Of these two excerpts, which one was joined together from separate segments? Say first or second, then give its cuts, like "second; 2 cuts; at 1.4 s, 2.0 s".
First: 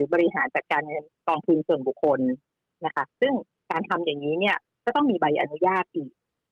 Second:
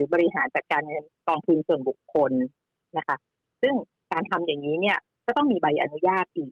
first; 2 cuts; at 1.9 s, 3.1 s